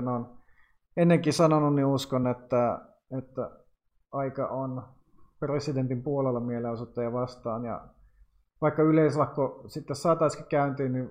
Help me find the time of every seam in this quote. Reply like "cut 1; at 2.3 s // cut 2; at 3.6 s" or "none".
none